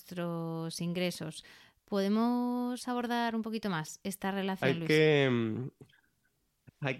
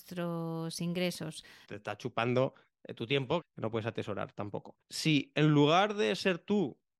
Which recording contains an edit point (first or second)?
second